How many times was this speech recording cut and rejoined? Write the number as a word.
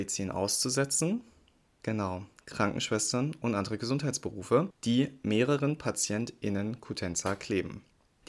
zero